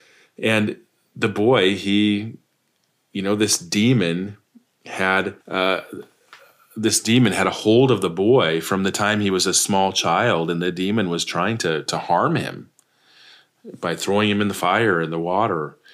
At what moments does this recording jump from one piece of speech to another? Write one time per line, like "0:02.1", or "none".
0:05.4

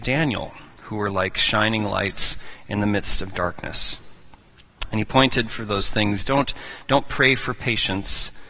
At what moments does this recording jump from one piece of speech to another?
none

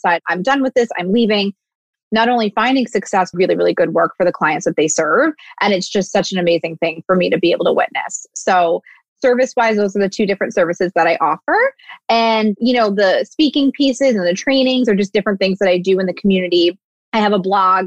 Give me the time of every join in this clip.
0:01.9
0:03.3

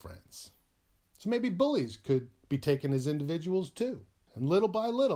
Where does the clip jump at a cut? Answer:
0:04.3

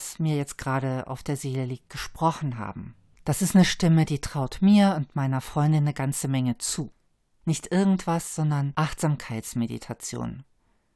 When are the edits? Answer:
0:07.4

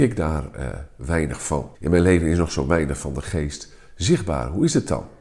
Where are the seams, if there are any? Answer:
0:01.7

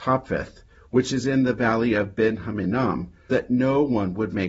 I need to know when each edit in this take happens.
0:03.3

